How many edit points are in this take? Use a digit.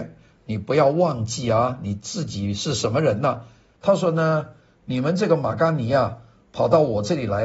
1